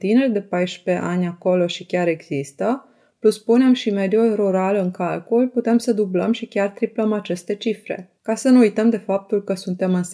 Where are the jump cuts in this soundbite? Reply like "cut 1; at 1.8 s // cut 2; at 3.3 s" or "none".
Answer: cut 1; at 8.2 s